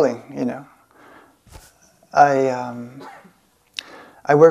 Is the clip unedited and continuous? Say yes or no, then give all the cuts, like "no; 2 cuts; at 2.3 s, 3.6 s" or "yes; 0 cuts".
yes; 0 cuts